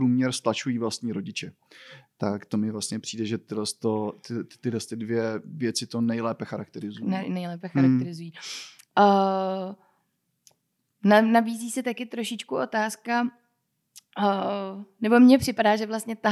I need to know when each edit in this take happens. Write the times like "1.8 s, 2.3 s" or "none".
none